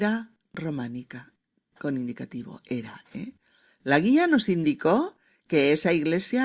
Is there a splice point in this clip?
no; 0 cuts

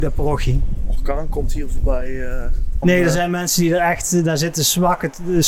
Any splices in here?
yes; 1 cut; at 2.8 s

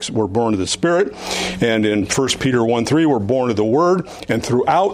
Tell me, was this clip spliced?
no; 0 cuts

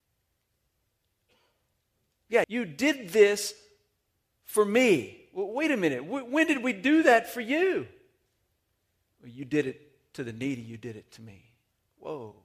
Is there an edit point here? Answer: yes; 1 cut; at 2.4 s

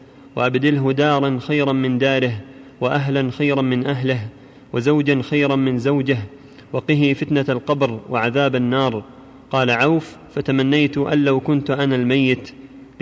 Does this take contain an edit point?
no; 0 cuts

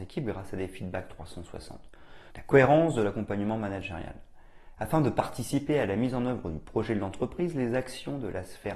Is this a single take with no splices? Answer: no; 2 cuts; at 2.3 s, 4.8 s

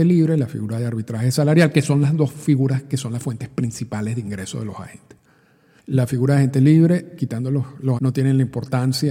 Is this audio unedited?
no; 2 cuts; at 5.8 s, 8.0 s

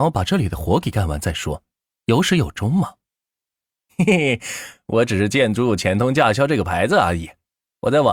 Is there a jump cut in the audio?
yes; 1 cut; at 3.9 s

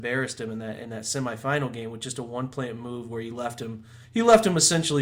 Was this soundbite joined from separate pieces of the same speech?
yes; 1 cut; at 4.0 s

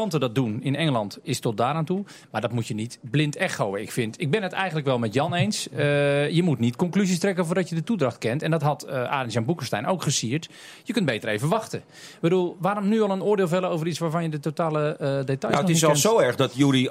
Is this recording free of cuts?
yes; 0 cuts

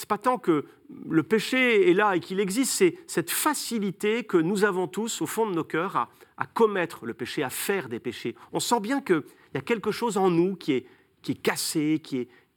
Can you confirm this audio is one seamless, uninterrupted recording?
yes; 0 cuts

